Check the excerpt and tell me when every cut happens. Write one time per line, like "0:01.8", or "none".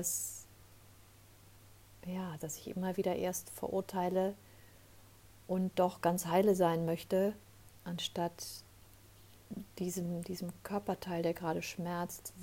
0:02.4